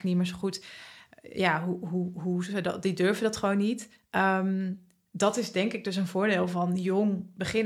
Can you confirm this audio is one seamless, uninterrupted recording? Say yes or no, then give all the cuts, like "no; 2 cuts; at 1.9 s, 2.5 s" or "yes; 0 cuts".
yes; 0 cuts